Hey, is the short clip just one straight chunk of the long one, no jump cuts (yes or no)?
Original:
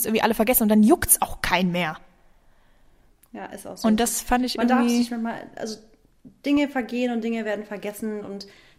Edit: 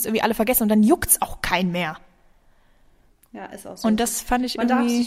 yes